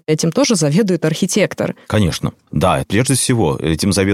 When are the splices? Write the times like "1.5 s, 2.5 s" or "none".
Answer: none